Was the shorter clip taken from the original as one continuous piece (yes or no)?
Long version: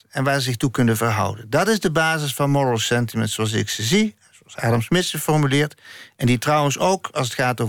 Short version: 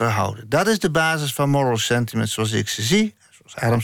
yes